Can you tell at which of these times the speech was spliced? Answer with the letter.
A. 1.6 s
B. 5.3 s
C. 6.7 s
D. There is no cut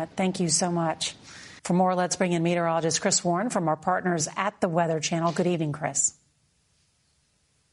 A